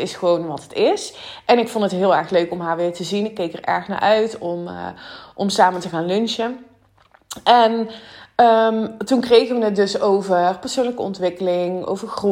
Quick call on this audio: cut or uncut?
uncut